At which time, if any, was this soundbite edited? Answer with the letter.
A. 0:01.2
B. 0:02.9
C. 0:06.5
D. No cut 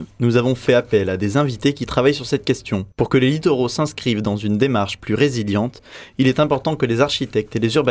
B